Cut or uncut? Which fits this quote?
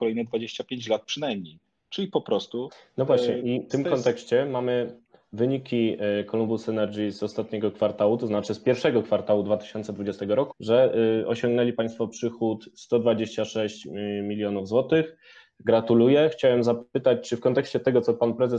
cut